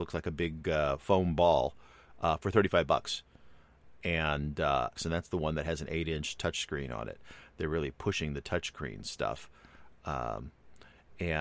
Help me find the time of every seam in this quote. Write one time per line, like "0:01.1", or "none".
0:05.0